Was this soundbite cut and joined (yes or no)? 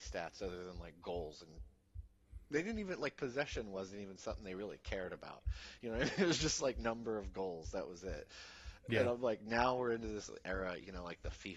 no